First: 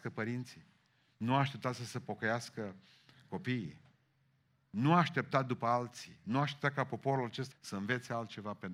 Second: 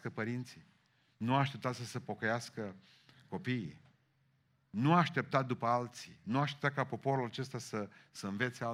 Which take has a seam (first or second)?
first